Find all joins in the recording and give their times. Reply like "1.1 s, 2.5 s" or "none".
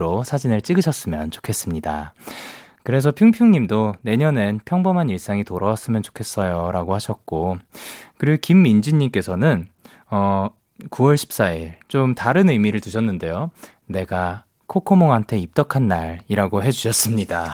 none